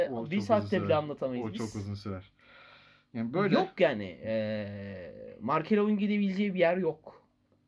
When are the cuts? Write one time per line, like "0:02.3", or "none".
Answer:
none